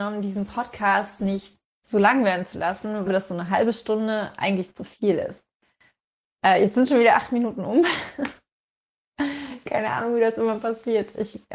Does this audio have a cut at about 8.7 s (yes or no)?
no